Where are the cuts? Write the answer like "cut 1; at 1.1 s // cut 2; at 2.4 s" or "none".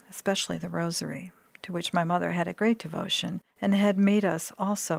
cut 1; at 3.5 s

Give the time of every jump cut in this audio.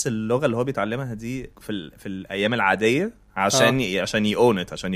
cut 1; at 1.5 s // cut 2; at 3.3 s

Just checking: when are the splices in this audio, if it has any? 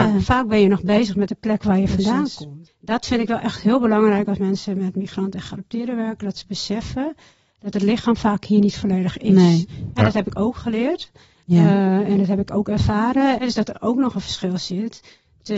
cut 1; at 2.7 s // cut 2; at 13.4 s

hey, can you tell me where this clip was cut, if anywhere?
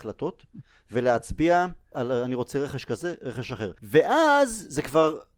cut 1; at 1.9 s // cut 2; at 3.8 s

